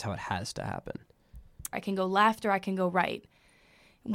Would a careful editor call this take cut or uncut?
cut